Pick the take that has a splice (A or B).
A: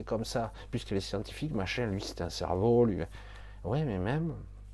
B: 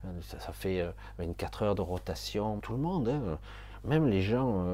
B